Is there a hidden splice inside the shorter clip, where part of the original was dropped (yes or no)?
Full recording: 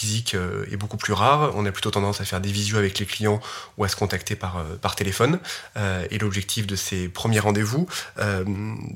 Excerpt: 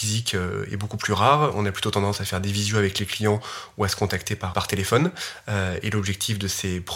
yes